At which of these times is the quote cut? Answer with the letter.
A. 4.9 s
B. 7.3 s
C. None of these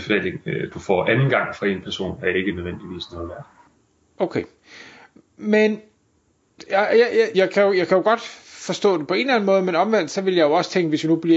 B